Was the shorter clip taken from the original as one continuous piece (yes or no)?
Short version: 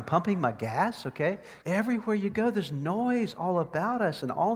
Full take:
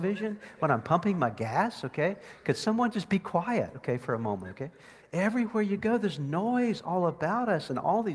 no